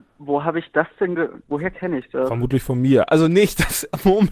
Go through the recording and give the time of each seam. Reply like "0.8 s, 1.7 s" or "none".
1.4 s

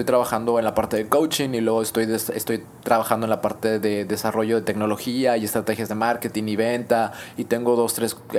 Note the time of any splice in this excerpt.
none

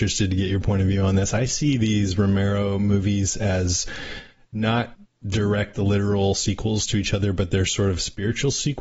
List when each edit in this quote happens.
none

